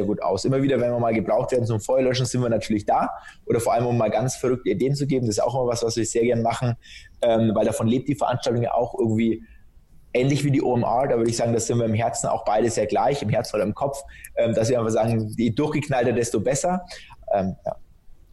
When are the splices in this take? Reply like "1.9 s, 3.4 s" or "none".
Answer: 17.2 s